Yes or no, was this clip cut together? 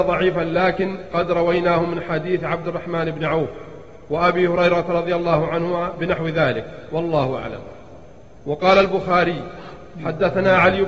no